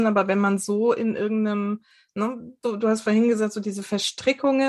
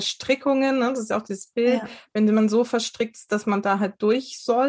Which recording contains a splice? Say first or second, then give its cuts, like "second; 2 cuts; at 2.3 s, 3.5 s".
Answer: first; 1 cut; at 2.6 s